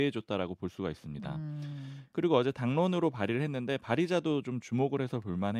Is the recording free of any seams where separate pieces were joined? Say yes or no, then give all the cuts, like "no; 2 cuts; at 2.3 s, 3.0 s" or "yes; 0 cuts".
yes; 0 cuts